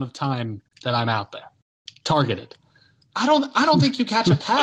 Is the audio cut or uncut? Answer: uncut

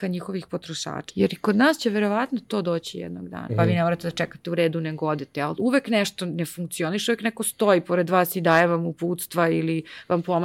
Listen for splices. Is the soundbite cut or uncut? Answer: cut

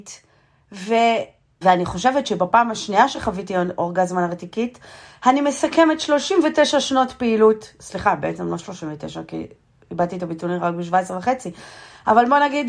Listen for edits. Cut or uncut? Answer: cut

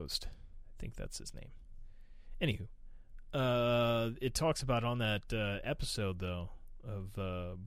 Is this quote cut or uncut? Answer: uncut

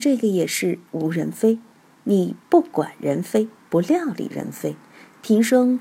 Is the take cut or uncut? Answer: uncut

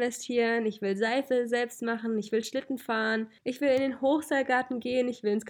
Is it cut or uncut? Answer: cut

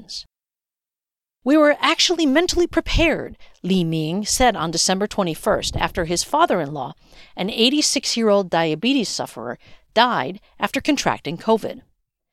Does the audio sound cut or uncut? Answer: uncut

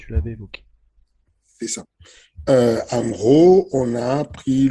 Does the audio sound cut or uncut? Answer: uncut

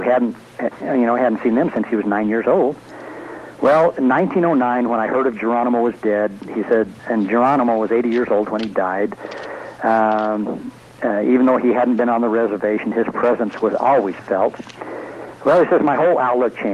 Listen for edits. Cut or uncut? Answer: cut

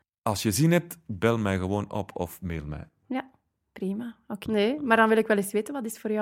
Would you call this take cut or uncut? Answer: cut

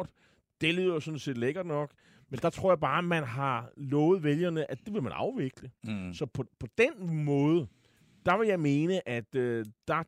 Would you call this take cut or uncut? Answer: uncut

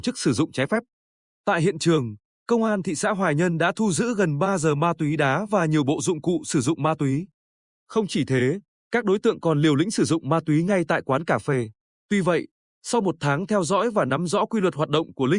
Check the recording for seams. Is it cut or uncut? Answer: cut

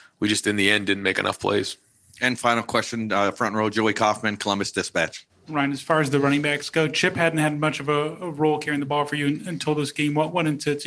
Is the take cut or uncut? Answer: uncut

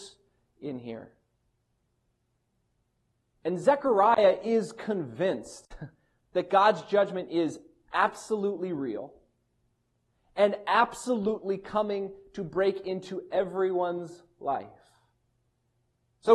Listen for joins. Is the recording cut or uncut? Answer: uncut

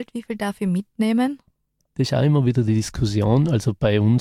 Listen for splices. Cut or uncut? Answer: uncut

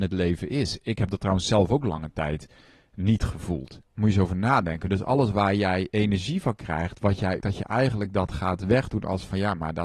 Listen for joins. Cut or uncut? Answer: cut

